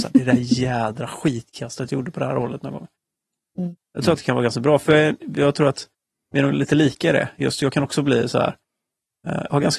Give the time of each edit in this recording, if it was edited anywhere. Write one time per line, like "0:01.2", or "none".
none